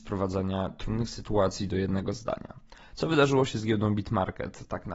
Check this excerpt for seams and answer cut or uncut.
uncut